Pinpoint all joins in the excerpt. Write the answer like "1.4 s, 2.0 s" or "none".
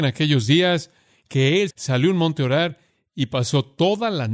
1.7 s